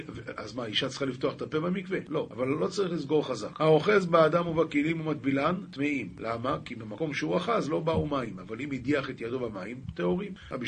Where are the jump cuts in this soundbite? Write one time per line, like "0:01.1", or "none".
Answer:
none